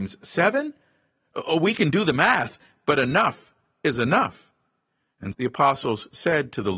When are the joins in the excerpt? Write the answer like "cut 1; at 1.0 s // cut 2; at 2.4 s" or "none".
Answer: cut 1; at 5.3 s